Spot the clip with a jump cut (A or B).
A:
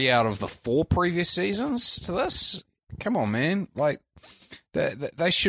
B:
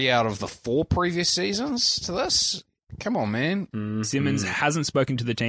B